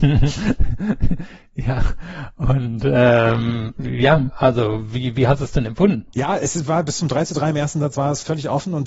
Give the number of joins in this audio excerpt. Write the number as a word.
one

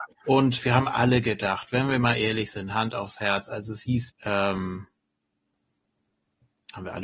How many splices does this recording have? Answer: one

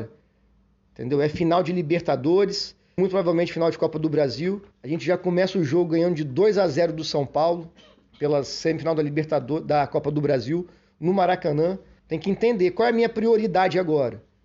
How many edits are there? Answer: three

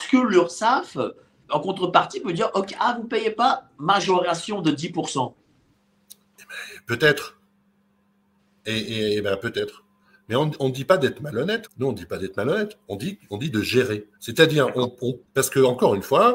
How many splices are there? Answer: three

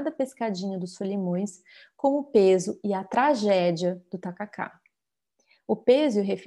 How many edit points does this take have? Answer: zero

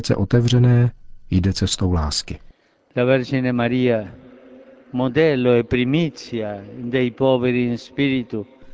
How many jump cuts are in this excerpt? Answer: zero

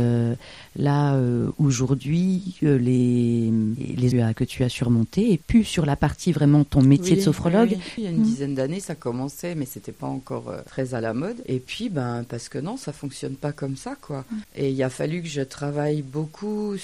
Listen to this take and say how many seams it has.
two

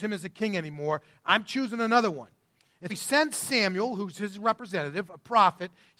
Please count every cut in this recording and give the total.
one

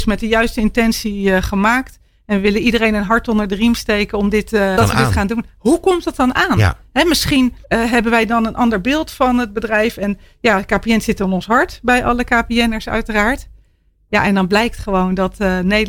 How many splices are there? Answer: two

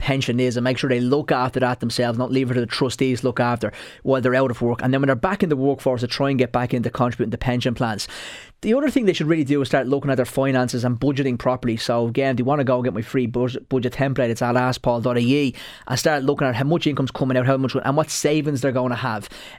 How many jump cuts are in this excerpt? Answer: zero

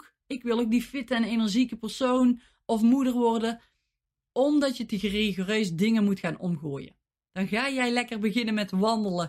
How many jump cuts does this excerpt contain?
two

